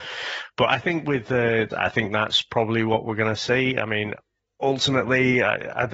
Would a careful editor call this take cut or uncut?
cut